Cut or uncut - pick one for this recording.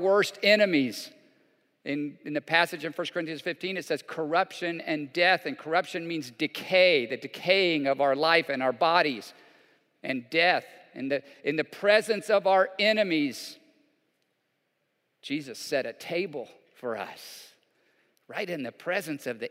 uncut